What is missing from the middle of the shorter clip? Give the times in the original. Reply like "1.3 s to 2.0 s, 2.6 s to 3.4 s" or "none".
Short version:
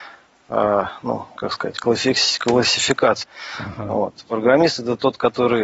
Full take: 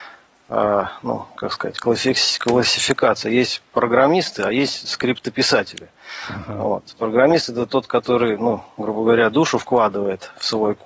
3.2 s to 5.9 s